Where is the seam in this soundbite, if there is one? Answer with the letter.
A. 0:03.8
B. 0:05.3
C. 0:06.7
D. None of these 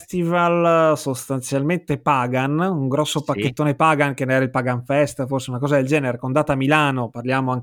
D